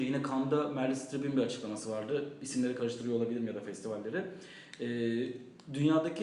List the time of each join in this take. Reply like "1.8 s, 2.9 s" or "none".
none